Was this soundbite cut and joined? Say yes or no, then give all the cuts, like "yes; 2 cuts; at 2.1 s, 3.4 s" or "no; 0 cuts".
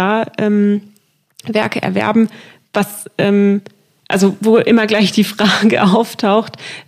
no; 0 cuts